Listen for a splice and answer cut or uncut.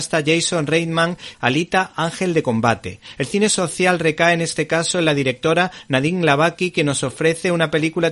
cut